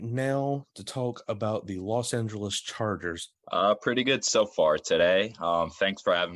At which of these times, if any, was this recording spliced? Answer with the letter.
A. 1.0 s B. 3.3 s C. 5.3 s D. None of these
B